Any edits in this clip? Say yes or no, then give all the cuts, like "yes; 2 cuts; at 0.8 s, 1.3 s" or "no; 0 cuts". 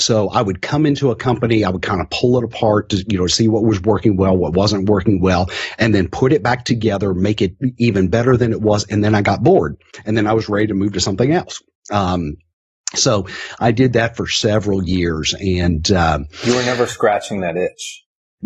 no; 0 cuts